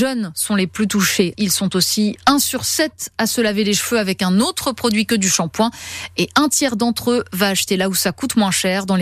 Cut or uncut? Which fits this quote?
cut